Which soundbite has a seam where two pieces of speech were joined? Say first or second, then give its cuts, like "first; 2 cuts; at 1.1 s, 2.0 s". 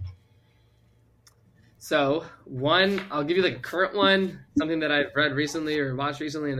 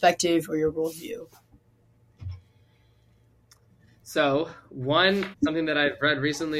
second; 1 cut; at 5.3 s